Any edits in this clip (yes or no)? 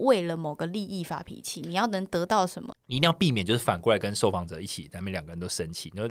yes